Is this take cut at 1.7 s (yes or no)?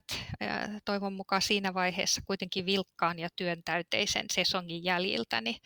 no